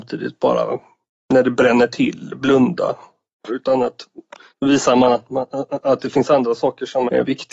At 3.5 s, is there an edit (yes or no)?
yes